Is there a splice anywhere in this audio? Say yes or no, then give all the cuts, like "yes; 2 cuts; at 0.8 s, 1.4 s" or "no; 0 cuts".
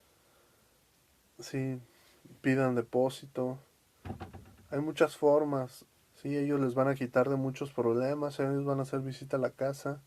yes; 1 cut; at 5.9 s